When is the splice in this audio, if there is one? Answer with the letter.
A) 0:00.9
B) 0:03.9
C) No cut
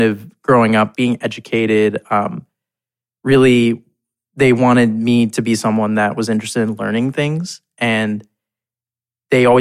A